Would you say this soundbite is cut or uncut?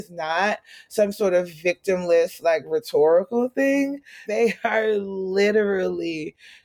cut